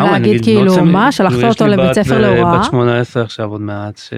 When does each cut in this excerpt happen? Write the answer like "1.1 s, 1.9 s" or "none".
none